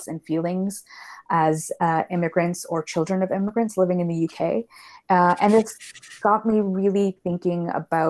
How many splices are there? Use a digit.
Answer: 0